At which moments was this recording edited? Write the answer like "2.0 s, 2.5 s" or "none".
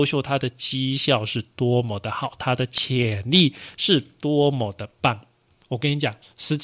5.6 s